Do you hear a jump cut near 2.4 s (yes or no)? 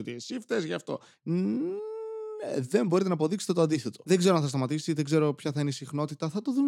no